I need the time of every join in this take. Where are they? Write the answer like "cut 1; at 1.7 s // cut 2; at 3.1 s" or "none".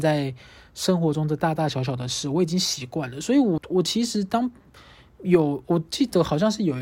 cut 1; at 3.6 s